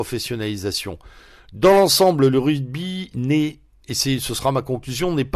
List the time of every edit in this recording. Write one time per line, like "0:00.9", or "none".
none